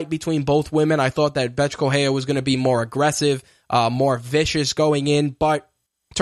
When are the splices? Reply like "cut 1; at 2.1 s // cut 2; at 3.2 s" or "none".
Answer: none